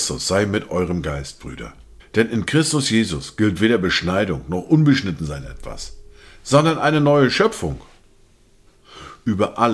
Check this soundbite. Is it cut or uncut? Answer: cut